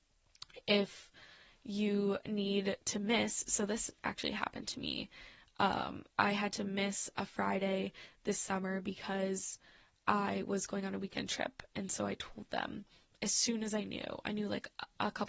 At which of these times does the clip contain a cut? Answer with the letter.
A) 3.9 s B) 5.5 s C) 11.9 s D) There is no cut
D